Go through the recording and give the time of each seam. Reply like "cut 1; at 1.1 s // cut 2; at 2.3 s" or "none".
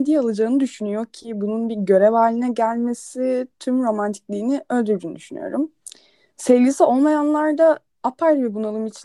none